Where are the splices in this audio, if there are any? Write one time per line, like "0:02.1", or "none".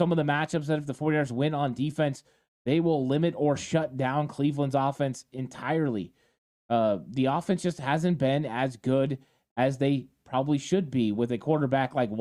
none